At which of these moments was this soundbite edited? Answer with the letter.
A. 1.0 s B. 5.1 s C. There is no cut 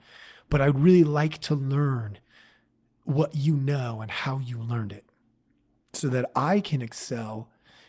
C